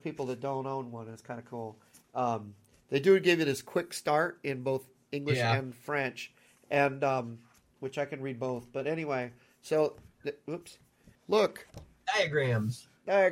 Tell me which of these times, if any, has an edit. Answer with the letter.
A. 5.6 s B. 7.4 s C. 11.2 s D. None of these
C